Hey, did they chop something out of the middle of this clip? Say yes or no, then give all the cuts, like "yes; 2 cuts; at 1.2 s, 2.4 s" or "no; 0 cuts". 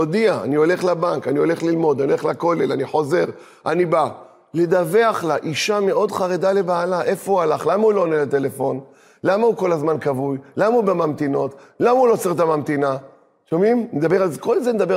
no; 0 cuts